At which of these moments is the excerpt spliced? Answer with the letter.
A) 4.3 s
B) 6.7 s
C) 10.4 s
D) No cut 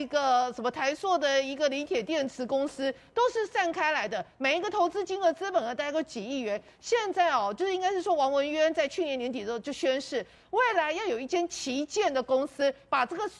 D